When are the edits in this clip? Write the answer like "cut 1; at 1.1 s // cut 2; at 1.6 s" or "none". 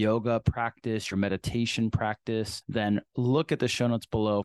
none